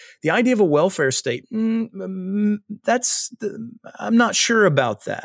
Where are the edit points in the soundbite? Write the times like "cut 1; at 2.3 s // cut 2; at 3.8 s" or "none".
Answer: cut 1; at 1.4 s